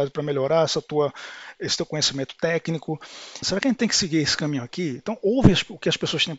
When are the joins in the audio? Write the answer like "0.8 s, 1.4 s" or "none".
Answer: 3.4 s